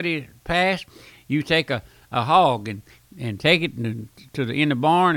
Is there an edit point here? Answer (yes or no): no